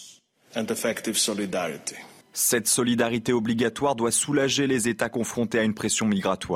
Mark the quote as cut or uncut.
uncut